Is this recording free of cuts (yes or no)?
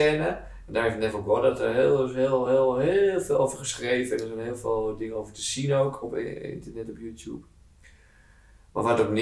yes